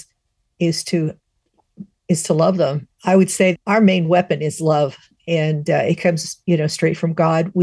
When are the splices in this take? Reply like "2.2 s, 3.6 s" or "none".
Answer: 2.9 s